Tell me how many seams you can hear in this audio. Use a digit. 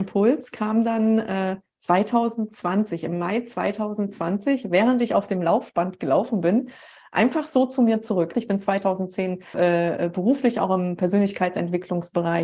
2